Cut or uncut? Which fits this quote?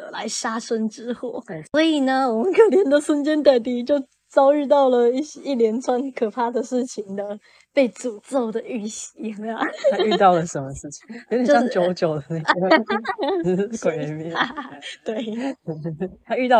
uncut